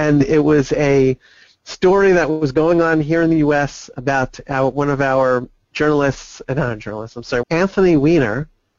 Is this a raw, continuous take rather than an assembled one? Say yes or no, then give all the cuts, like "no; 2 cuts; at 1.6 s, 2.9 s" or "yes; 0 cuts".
no; 1 cut; at 7.4 s